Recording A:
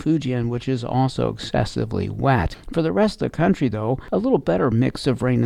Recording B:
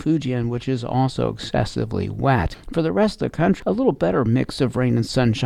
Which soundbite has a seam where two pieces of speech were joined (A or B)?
B